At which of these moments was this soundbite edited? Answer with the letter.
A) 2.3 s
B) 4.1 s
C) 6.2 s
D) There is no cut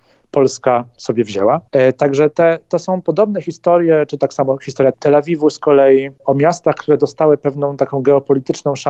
A